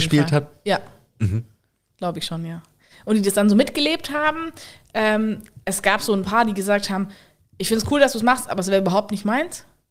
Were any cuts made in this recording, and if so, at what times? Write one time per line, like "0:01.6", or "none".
none